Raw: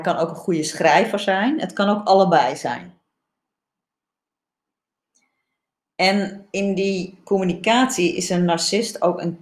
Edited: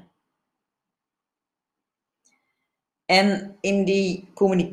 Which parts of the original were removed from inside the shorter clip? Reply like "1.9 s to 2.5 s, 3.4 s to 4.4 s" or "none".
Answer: none